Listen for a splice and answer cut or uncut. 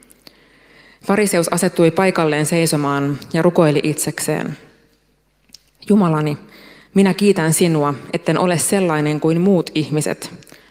uncut